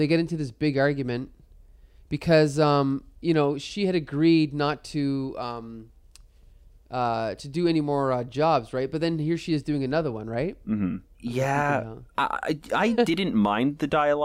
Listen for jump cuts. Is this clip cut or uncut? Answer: uncut